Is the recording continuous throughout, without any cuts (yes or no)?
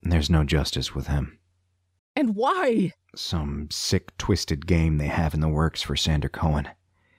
no